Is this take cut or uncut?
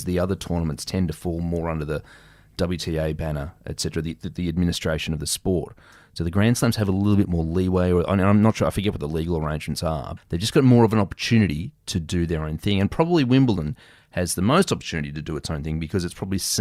cut